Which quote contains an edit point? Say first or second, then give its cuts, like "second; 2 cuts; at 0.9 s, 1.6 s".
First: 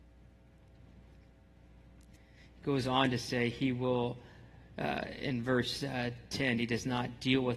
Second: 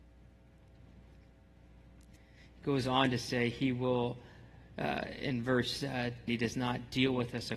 second; 1 cut; at 6.3 s